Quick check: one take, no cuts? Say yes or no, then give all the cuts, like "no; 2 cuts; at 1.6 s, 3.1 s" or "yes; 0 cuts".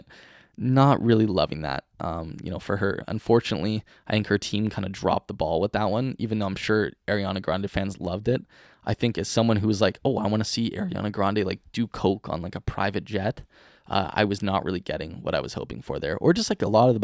yes; 0 cuts